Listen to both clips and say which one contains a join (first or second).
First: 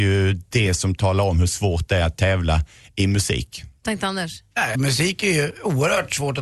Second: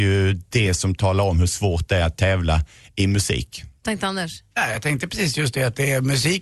first